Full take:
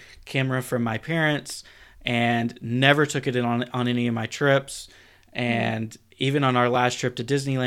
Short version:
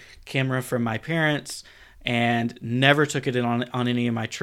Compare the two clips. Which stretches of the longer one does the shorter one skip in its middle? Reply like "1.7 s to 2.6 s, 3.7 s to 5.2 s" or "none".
none